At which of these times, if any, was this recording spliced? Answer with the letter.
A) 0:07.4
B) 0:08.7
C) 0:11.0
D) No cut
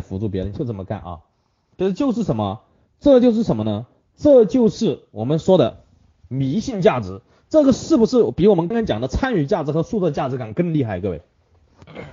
B